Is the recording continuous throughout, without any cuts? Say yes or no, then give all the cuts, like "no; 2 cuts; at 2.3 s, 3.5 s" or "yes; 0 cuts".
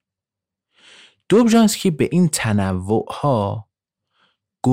yes; 0 cuts